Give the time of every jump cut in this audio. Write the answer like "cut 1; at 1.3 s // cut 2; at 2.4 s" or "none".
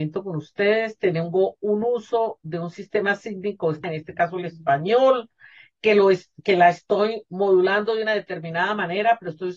cut 1; at 3.8 s

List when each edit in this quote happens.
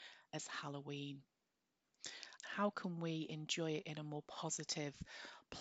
cut 1; at 2.4 s

